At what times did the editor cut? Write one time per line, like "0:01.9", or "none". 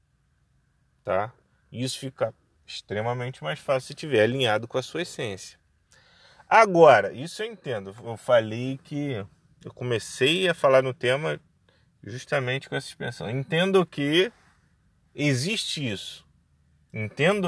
none